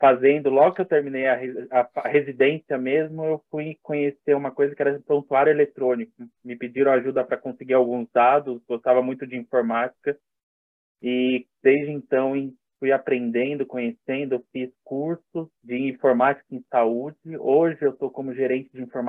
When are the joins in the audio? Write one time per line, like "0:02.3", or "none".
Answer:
0:15.6